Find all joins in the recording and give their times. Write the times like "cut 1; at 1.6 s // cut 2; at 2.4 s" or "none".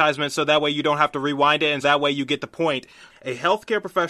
cut 1; at 1.8 s // cut 2; at 3.1 s